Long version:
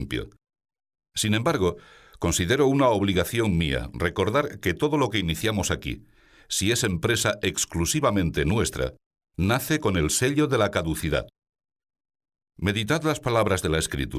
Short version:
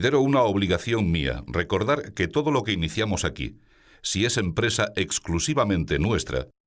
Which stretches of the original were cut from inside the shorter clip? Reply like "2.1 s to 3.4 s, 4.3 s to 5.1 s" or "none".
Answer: none